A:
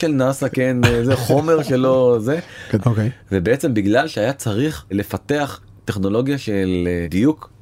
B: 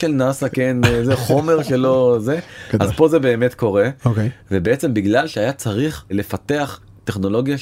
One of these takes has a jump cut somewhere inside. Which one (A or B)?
A